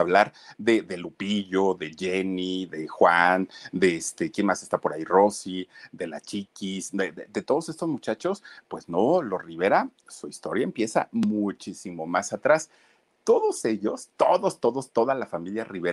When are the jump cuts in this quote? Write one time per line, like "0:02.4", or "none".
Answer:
none